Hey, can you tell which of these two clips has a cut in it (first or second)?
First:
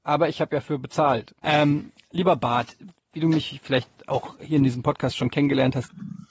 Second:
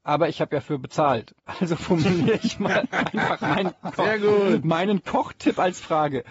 first